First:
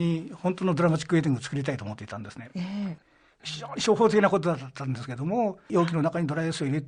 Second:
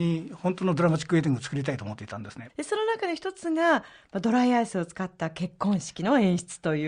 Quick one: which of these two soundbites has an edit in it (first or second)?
second